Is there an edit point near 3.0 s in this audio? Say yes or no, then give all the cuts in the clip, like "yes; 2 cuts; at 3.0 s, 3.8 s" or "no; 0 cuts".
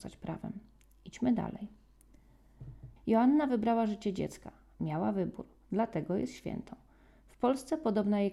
yes; 1 cut; at 3.0 s